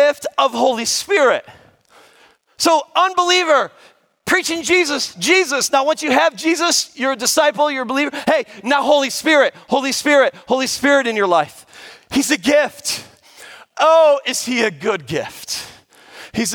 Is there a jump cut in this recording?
no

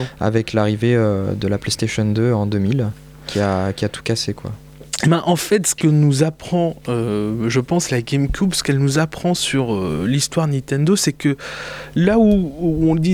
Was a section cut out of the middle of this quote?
no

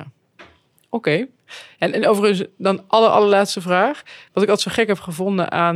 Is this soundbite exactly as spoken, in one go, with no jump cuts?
yes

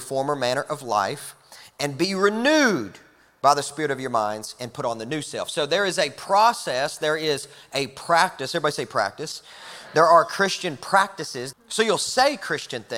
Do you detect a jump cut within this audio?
yes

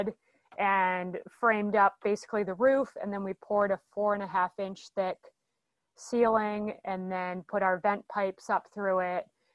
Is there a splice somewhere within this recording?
no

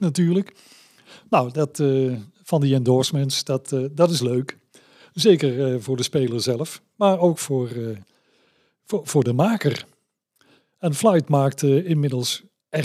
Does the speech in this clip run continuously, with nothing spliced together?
yes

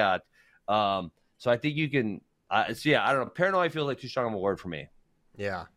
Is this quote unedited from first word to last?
yes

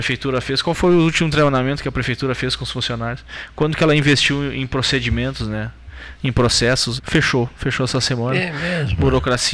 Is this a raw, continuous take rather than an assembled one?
no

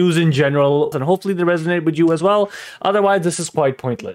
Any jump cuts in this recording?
yes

